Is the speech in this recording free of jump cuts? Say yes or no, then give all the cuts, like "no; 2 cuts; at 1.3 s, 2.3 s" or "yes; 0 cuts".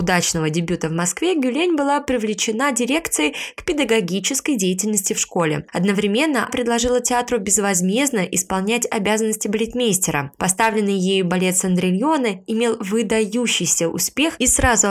no; 1 cut; at 6.5 s